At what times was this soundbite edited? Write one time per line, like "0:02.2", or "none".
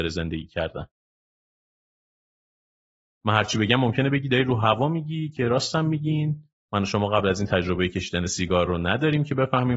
none